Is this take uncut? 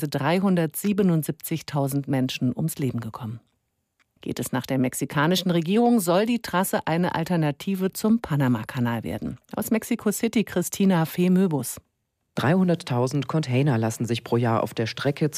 no; 1 cut; at 4.2 s

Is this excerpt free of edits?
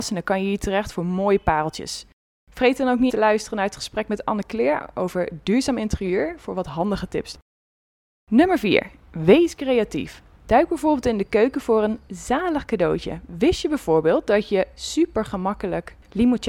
no; 2 cuts; at 3.1 s, 10.4 s

